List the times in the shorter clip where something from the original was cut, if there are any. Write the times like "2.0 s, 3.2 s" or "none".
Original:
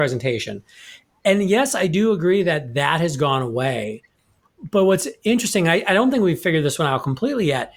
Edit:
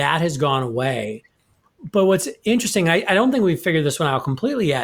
none